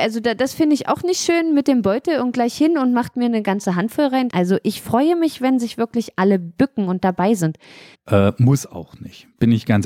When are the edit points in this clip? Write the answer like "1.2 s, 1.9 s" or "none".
4.3 s, 7.9 s